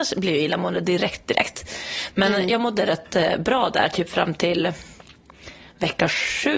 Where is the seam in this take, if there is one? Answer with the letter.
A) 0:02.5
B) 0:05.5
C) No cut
C